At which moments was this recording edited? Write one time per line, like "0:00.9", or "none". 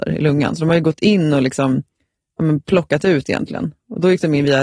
none